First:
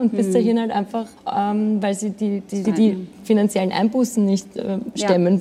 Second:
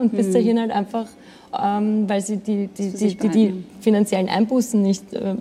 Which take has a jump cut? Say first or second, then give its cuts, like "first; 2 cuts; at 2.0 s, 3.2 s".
first; 2 cuts; at 1.2 s, 2.6 s